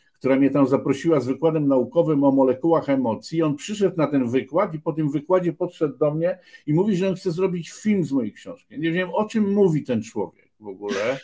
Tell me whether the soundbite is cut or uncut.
uncut